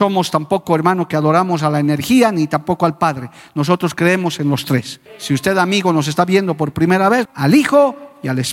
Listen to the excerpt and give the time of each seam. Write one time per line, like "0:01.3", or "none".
0:05.1
0:07.3